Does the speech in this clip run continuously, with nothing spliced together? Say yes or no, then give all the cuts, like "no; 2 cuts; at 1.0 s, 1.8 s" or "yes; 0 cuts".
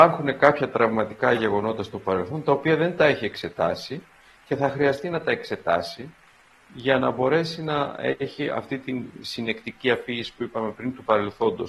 yes; 0 cuts